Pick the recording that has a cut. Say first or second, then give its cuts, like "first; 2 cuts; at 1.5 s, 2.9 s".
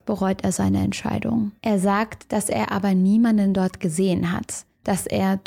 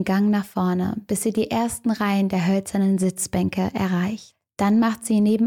first; 1 cut; at 1.6 s